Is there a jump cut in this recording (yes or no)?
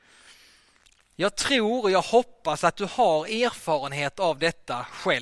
yes